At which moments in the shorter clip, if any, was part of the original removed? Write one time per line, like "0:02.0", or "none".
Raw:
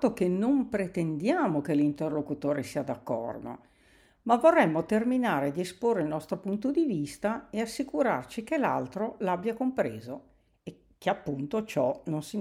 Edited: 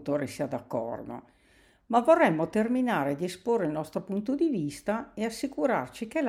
none